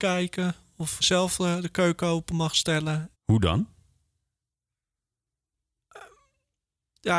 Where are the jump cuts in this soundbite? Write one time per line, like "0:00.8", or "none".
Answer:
0:01.0
0:03.1